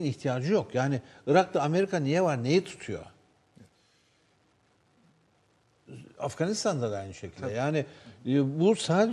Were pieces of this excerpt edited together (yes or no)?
no